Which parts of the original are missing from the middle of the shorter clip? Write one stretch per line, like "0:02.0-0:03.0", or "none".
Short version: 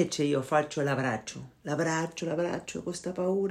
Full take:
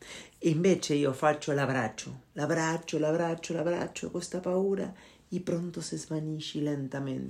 0:02.9-0:03.5